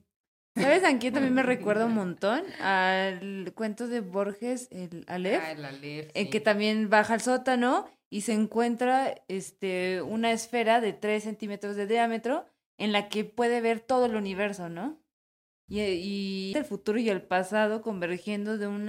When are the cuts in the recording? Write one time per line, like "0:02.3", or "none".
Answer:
0:16.5